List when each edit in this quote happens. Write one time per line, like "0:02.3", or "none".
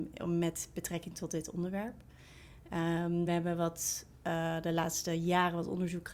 0:03.3

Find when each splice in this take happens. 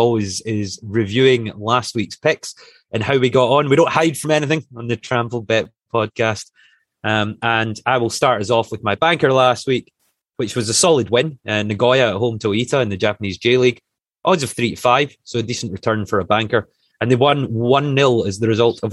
none

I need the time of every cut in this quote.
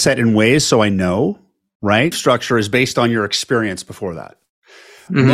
0:02.1

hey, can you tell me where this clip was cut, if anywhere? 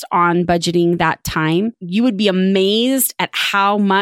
none

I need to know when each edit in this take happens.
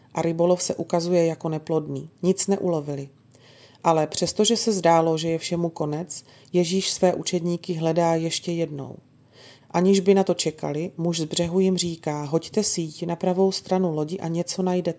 0:02.2
0:09.6

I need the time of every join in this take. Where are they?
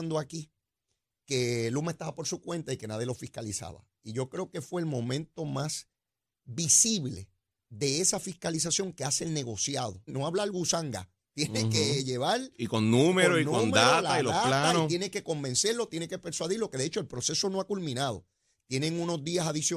0:10.1

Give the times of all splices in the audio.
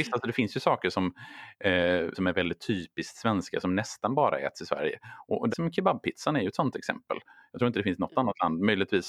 0:02.1
0:05.5

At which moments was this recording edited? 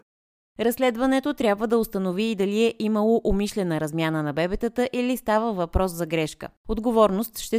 0:06.6

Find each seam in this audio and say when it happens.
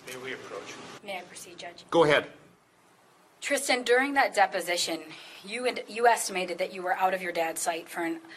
0:01.0

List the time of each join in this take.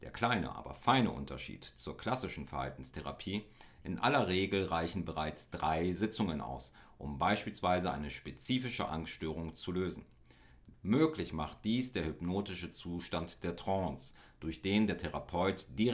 0:10.7

